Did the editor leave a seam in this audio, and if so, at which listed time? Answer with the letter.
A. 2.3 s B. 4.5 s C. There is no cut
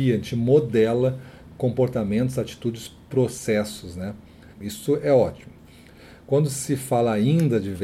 B